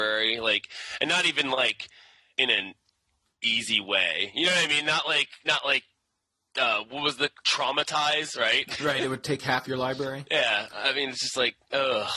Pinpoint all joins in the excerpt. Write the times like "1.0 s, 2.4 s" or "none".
none